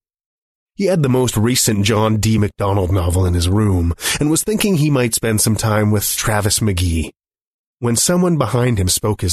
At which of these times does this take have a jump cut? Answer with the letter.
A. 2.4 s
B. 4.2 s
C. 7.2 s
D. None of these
D